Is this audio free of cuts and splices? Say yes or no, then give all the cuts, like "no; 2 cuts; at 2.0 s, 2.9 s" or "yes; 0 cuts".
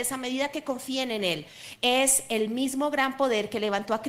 no; 1 cut; at 1.8 s